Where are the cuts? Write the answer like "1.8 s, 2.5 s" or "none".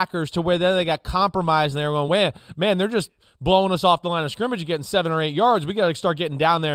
none